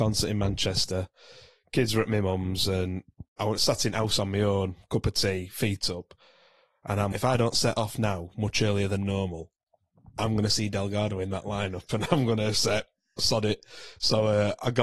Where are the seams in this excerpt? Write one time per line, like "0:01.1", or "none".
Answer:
0:07.1